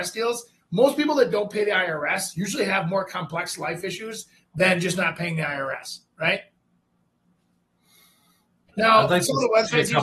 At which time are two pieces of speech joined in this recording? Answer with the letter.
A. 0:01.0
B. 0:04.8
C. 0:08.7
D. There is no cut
C